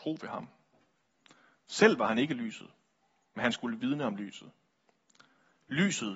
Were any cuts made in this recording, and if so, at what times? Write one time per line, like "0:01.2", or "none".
none